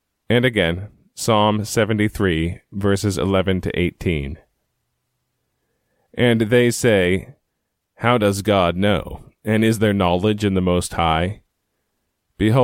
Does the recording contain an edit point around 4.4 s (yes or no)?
no